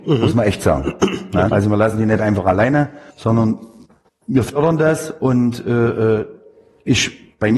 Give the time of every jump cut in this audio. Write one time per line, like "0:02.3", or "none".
0:01.5
0:03.1